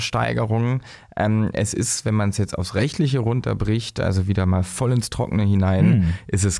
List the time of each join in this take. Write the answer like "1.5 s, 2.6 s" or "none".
none